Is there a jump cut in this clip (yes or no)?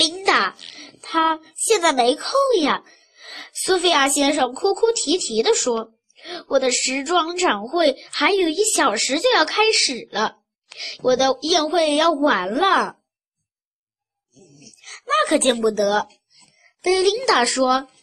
yes